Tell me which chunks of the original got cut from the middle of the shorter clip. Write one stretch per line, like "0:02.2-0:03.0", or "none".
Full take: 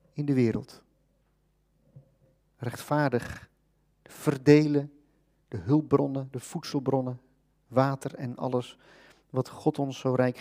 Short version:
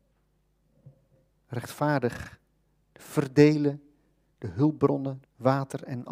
0:06.3-0:07.5